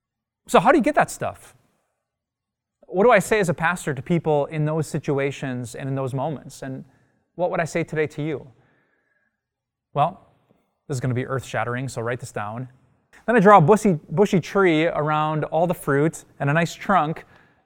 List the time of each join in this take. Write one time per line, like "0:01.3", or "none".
0:13.1

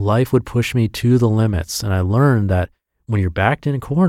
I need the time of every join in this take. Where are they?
none

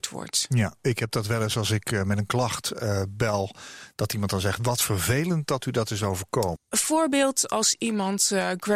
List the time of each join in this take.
0:06.6

